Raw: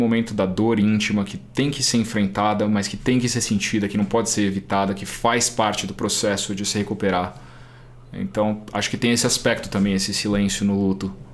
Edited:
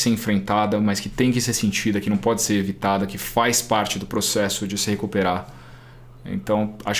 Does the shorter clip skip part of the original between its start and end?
no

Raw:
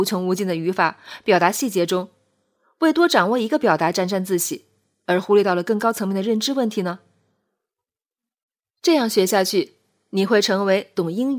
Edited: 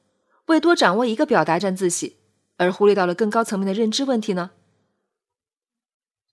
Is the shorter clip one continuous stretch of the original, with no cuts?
no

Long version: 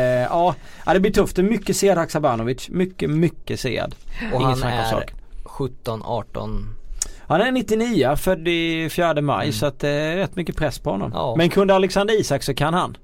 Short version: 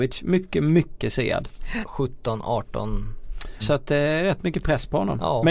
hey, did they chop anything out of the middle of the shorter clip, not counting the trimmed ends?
yes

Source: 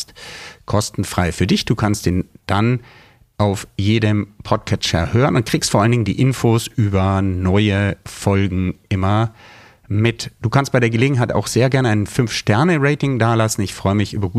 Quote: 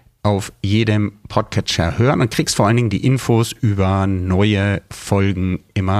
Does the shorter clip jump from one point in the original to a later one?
no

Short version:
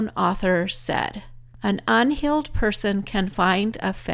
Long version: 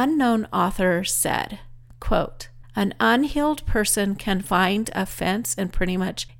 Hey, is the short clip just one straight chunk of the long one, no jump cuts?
no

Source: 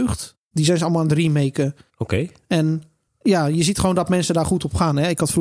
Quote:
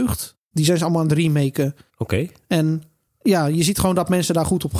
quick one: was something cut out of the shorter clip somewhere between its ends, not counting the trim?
no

